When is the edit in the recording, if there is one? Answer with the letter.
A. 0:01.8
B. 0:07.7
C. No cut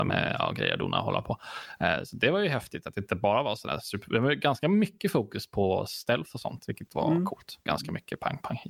B